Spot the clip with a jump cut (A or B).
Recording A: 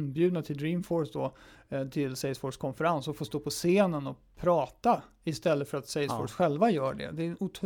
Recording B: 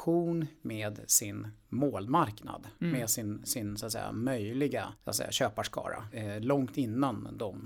B